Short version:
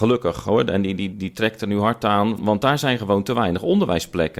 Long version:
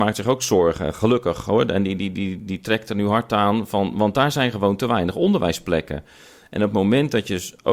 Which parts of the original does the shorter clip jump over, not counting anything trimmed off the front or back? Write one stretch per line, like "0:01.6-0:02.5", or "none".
0:02.1-0:02.4
0:03.7-0:03.9